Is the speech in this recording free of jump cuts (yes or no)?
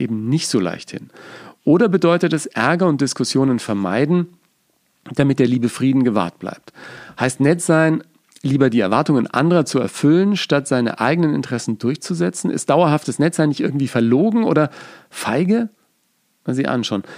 yes